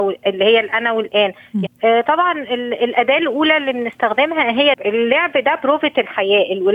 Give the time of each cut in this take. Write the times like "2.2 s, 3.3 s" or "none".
1.7 s, 4.7 s